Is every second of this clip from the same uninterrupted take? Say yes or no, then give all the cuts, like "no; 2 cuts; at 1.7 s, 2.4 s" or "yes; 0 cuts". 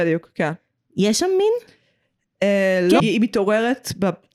no; 1 cut; at 3.0 s